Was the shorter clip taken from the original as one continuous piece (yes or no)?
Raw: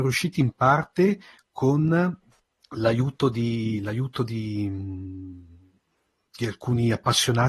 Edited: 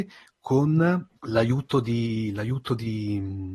no